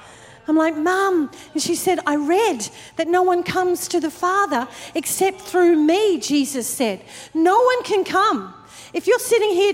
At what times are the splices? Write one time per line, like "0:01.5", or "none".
none